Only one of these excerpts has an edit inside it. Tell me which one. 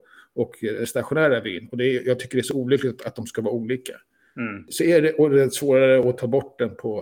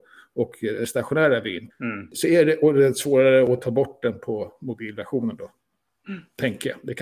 second; 1 cut; at 1.7 s

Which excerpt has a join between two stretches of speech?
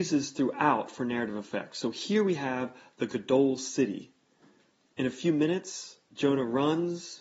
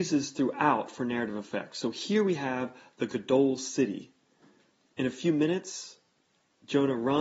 first; 1 cut; at 6.0 s

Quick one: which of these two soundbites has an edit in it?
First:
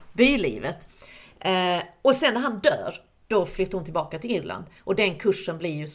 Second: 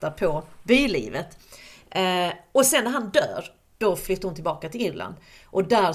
first; 1 cut; at 4.8 s

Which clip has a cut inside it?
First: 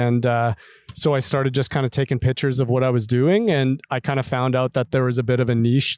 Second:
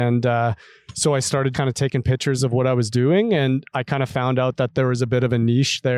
second; 1 cut; at 1.5 s

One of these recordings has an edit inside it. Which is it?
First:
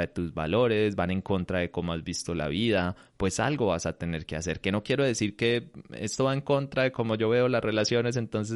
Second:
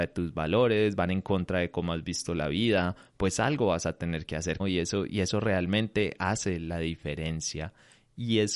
second; 1 cut; at 4.6 s

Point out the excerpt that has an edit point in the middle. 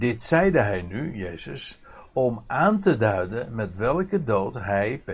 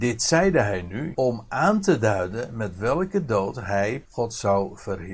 second; 2 cuts; at 1.1 s, 4.0 s

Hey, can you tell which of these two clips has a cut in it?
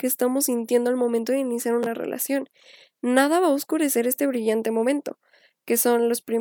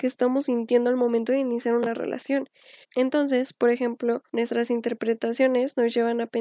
second; 2 cuts; at 2.8 s, 4.3 s

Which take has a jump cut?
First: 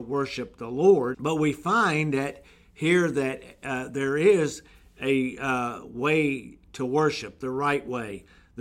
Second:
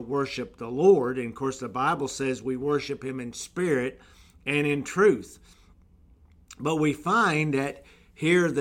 first; 1 cut; at 1.1 s

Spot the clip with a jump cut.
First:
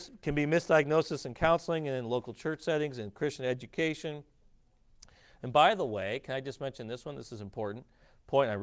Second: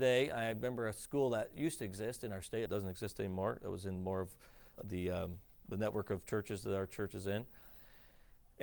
second; 2 cuts; at 2.7 s, 4.8 s

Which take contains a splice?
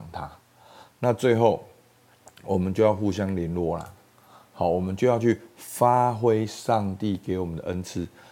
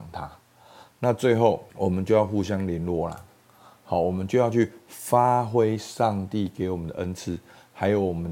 second; 1 cut; at 1.7 s

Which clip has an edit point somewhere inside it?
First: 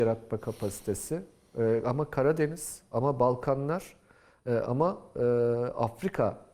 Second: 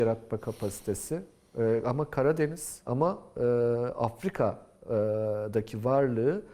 second; 1 cut; at 2.9 s

